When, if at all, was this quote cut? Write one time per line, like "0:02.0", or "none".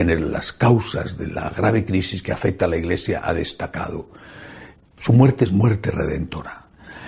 0:05.0